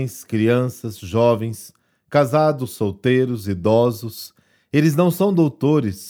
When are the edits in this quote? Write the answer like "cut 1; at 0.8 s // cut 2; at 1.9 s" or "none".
none